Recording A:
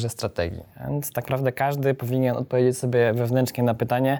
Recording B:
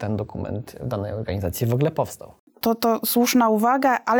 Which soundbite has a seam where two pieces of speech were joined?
A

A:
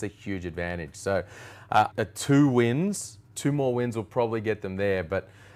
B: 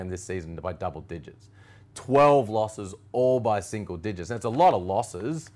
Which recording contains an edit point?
A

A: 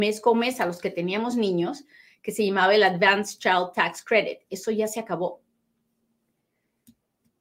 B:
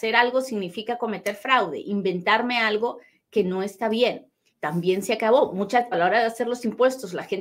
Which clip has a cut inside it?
B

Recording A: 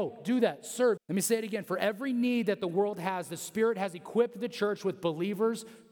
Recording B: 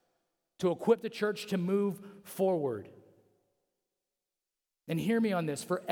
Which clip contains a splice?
A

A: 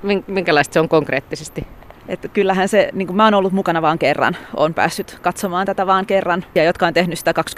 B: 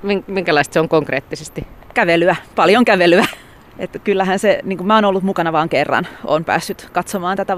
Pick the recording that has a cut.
A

